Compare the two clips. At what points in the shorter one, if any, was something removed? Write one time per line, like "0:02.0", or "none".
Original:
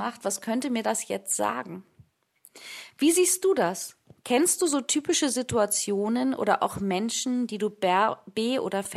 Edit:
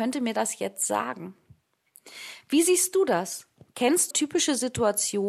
0:04.1